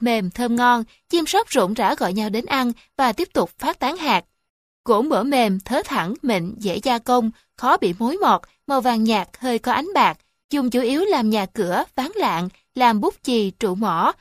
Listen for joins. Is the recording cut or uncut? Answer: uncut